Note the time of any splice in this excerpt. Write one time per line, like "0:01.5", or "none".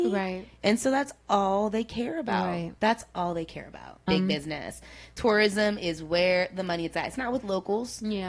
0:02.8
0:04.1